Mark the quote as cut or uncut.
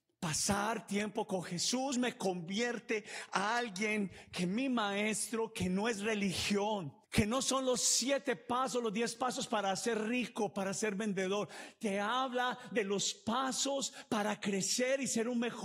cut